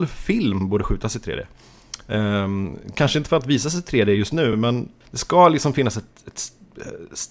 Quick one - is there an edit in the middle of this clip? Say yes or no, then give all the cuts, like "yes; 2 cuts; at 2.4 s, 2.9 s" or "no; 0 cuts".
no; 0 cuts